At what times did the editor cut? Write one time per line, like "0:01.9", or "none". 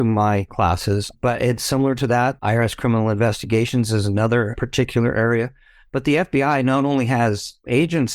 0:02.4